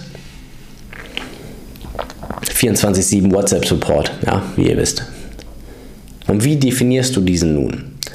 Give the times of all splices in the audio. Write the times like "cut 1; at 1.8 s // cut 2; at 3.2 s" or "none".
cut 1; at 2.4 s // cut 2; at 4.5 s // cut 3; at 6.3 s